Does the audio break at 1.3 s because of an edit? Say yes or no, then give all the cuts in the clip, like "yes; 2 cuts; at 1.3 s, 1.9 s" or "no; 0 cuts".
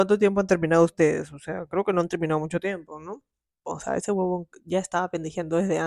no; 1 cut; at 3.6 s